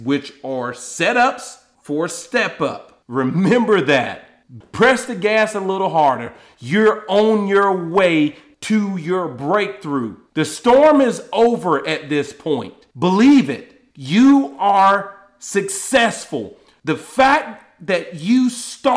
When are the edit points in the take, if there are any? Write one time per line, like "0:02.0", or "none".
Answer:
0:04.6